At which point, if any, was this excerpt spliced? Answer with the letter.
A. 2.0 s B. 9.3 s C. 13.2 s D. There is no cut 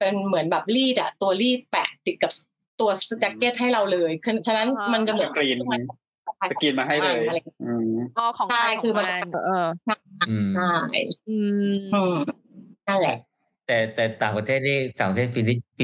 B